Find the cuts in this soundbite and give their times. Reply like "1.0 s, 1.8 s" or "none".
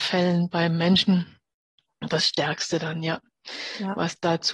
none